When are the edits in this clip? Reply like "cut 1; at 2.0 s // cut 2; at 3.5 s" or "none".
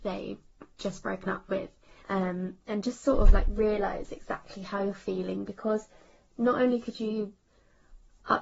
cut 1; at 2.0 s